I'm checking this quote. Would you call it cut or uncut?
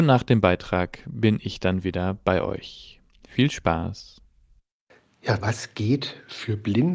cut